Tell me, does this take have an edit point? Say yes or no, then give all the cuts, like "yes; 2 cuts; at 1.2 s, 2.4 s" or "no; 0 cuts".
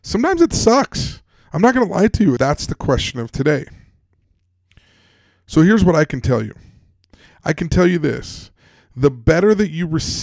yes; 1 cut; at 2.4 s